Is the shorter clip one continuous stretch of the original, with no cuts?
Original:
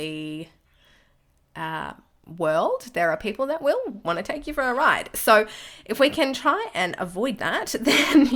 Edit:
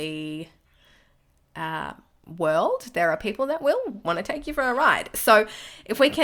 yes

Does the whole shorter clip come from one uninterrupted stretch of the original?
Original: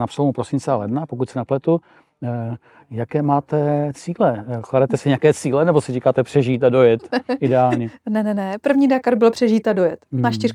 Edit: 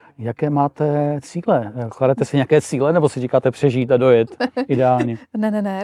yes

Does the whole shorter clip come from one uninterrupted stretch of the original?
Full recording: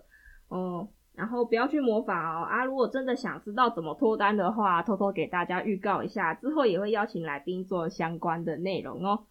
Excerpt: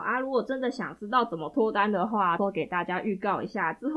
no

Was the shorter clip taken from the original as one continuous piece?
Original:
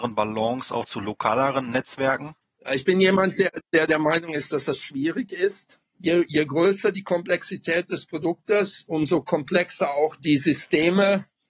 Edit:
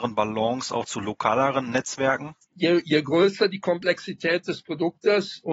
no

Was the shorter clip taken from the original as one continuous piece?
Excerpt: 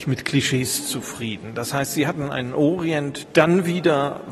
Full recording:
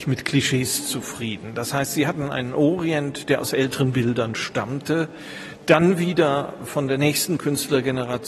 no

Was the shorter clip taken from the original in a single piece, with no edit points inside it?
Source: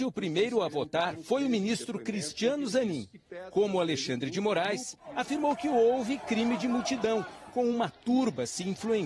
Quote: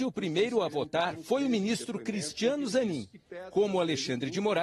yes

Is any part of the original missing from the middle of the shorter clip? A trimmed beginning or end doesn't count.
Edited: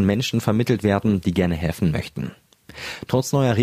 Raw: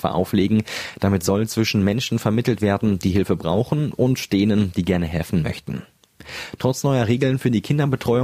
yes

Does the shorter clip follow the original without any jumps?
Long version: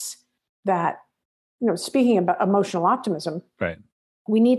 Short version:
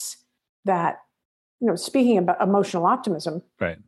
yes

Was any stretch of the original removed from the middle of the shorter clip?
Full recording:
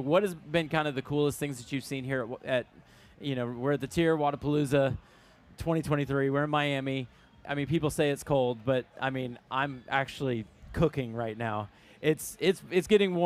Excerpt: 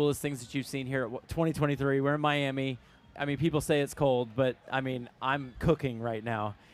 yes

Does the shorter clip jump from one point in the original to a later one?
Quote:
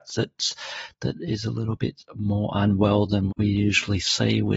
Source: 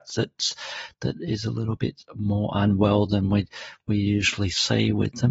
yes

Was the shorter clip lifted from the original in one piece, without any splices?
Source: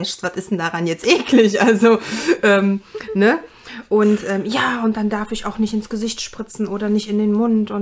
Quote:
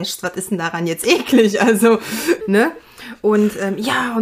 no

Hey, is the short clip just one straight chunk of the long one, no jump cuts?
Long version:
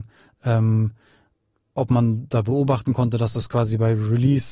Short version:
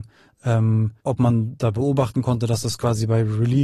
no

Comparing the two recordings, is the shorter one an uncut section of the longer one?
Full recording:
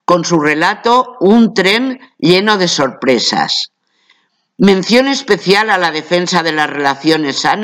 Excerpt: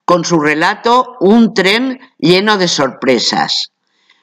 yes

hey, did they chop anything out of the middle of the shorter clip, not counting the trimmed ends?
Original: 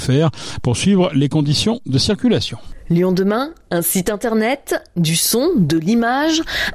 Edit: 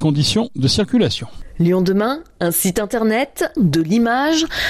yes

